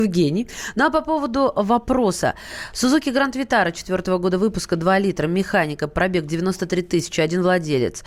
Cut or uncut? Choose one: uncut